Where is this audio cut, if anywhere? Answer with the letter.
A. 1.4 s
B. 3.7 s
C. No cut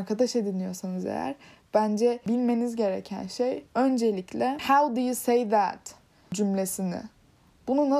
B